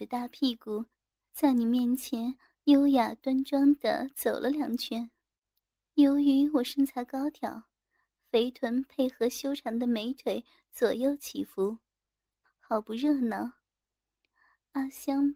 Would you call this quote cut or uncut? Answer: cut